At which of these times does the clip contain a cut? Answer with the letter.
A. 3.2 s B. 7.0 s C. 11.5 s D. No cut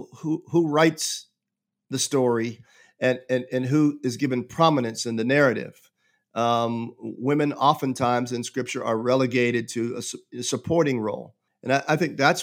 C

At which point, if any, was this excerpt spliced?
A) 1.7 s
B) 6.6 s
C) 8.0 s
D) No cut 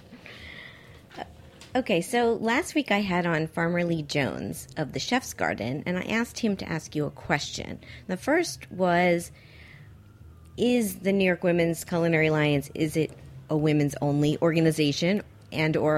C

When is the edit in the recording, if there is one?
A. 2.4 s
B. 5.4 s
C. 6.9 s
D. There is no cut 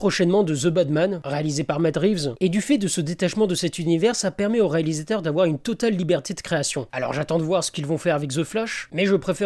C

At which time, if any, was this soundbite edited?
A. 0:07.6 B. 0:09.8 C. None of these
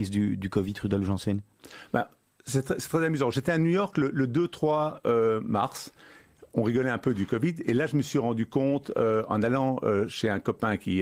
C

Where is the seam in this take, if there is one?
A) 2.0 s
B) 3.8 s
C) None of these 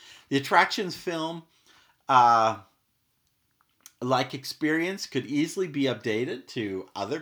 C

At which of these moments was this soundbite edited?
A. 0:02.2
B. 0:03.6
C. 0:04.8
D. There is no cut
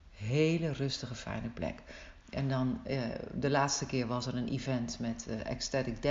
A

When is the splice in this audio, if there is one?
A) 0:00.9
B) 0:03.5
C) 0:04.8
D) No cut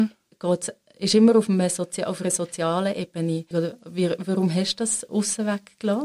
B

